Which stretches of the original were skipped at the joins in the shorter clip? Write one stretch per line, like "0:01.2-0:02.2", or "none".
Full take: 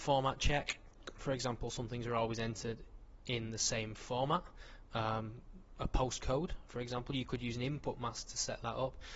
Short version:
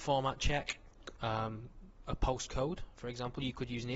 0:01.1-0:04.9